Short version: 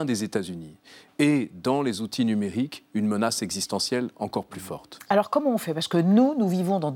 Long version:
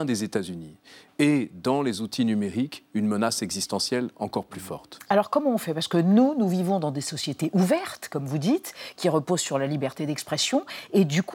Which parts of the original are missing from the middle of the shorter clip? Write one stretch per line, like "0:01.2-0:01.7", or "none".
none